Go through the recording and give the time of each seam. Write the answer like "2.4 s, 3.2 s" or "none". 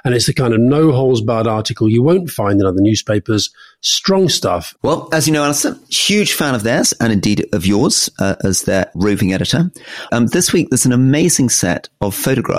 4.8 s, 10.1 s